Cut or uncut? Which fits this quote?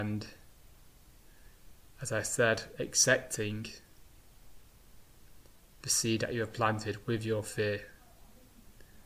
uncut